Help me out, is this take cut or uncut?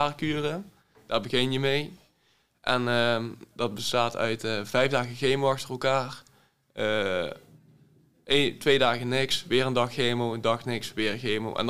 uncut